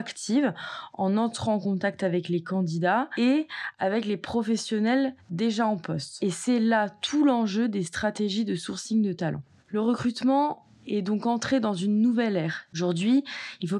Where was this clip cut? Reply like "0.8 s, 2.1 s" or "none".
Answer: 12.7 s